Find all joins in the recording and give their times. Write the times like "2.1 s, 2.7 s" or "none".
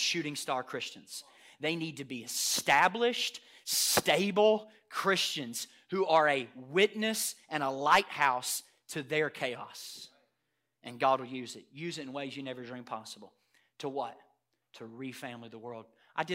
none